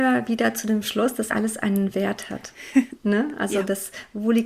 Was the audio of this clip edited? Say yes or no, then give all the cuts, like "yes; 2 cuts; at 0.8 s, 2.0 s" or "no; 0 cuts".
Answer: yes; 1 cut; at 1.3 s